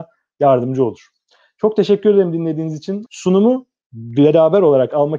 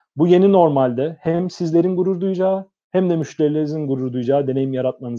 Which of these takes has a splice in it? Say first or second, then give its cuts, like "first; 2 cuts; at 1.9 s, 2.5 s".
first; 1 cut; at 3.1 s